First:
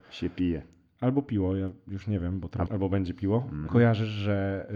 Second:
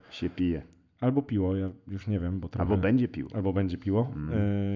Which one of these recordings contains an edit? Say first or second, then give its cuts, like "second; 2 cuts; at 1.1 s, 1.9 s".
first; 2 cuts; at 2.7 s, 3.7 s